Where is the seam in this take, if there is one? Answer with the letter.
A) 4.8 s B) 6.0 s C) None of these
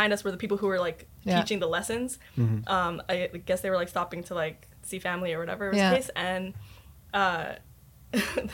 A